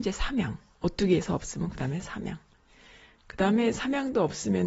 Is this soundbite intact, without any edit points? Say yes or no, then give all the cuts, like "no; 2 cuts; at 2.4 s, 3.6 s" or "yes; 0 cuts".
yes; 0 cuts